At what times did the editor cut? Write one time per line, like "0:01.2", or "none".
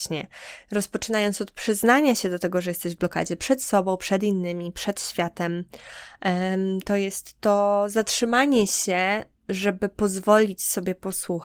none